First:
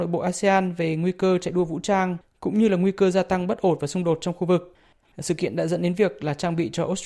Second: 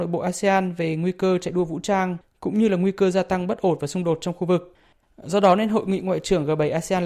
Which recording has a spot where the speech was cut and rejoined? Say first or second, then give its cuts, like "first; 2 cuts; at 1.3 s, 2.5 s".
first; 1 cut; at 5.0 s